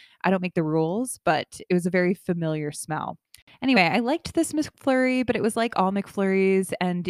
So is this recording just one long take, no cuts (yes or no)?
yes